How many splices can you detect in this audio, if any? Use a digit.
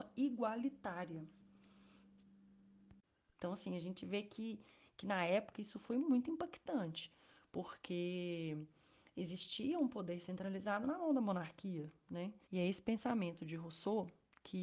2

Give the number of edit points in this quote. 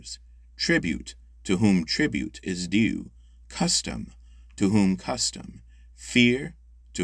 0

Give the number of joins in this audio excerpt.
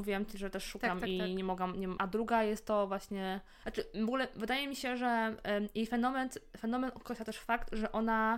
2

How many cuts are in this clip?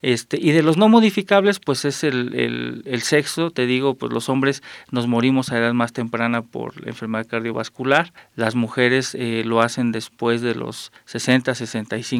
0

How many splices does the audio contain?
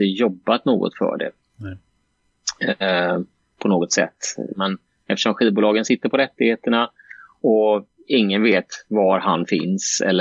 1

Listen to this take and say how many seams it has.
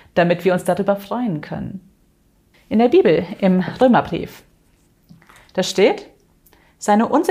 1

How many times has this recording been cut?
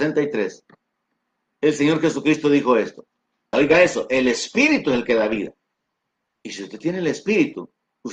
1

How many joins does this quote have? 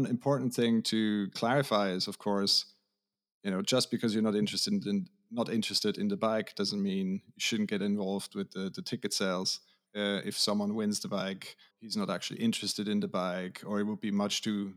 2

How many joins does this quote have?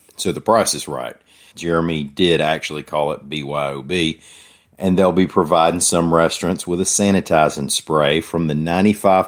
1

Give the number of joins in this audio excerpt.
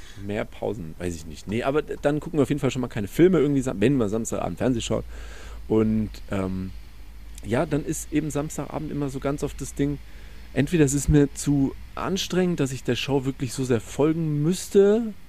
0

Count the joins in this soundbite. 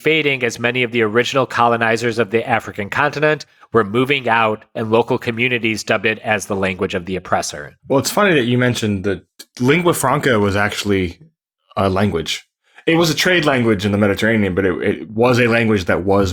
1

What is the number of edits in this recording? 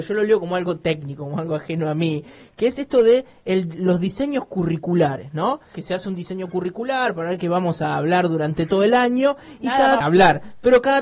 2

